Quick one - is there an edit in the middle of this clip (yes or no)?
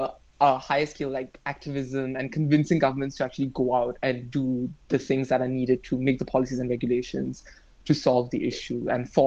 no